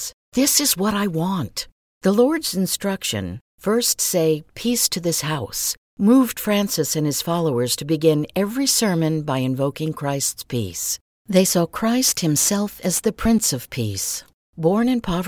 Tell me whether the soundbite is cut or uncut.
uncut